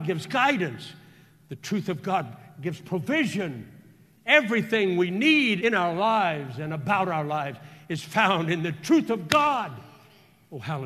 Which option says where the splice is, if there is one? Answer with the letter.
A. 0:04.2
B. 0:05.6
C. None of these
B